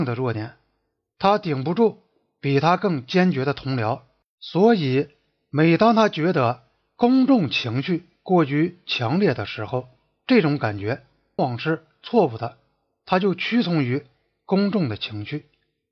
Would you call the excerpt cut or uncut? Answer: cut